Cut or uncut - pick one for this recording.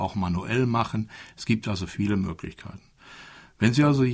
uncut